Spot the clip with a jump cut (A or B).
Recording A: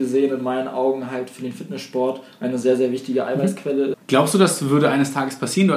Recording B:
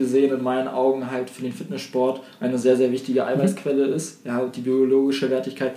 A